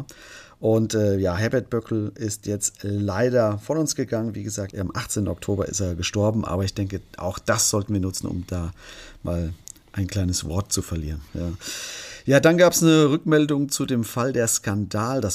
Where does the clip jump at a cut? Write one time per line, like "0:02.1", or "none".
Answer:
0:04.7
0:11.3